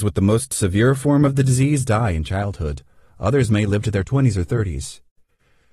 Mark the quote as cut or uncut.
uncut